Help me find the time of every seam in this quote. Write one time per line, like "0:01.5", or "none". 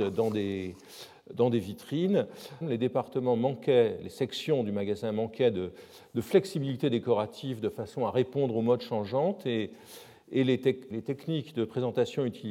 0:02.6
0:10.9